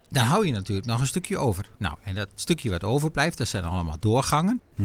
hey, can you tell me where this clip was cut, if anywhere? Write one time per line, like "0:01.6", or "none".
0:01.7